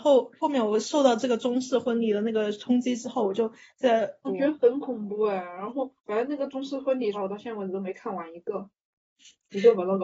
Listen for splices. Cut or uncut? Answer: cut